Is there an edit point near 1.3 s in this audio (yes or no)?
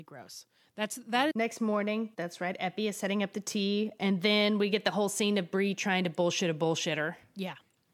yes